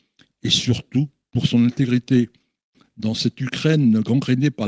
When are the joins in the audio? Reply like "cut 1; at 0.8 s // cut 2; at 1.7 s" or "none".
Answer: none